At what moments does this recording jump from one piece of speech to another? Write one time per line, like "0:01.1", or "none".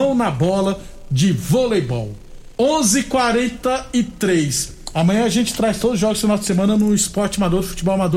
0:02.5